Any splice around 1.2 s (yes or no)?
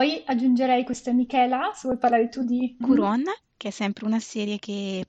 no